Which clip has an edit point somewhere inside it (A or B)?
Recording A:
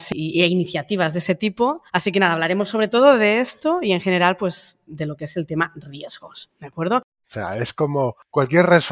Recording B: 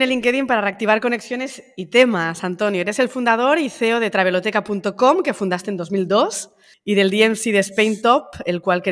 A